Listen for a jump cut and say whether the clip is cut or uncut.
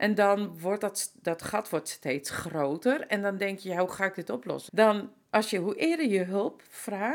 cut